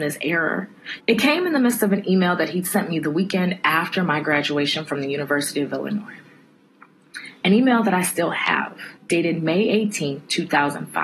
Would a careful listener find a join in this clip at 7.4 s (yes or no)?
no